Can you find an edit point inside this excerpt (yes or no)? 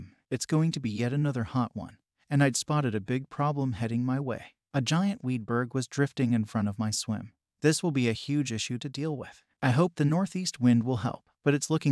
no